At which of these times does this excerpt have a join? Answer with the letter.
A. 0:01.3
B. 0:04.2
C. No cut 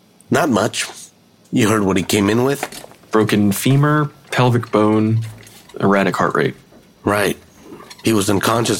C